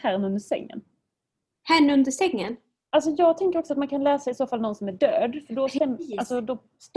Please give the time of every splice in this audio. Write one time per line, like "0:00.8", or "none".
0:02.9